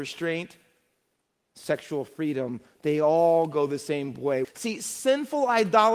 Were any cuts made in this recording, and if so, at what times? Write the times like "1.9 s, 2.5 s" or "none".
4.4 s